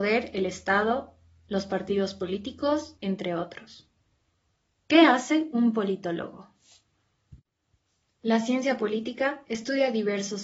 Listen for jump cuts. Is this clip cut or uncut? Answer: cut